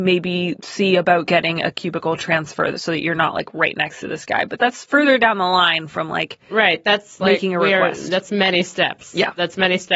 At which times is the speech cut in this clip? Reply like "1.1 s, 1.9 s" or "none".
4.6 s